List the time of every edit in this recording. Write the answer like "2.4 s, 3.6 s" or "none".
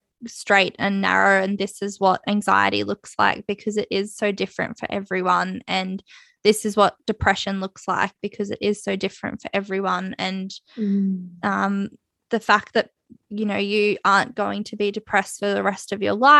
none